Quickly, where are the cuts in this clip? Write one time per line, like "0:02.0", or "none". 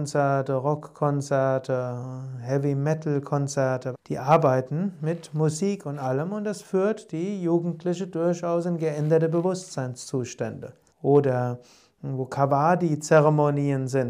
0:03.9
0:10.9